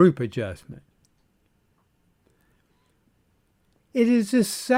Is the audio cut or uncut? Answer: uncut